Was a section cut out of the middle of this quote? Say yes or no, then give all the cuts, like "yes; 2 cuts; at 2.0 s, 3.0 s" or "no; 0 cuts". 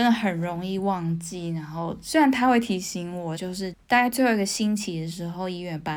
yes; 1 cut; at 3.4 s